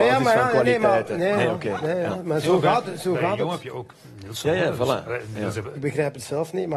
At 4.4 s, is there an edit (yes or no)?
yes